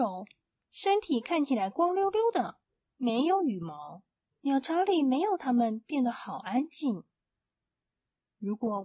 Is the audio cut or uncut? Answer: cut